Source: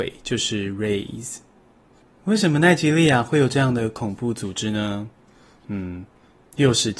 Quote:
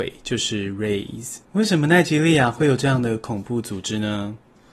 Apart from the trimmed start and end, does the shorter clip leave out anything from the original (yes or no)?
yes